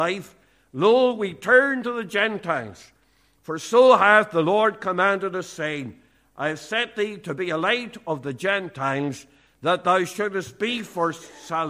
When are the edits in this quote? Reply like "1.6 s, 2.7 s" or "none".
none